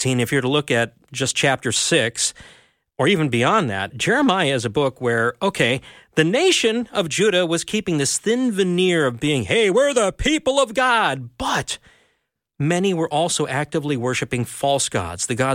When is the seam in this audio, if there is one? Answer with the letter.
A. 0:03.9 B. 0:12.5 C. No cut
A